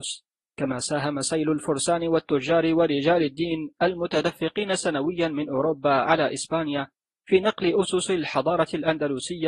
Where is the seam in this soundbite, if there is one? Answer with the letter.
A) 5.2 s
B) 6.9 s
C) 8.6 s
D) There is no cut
D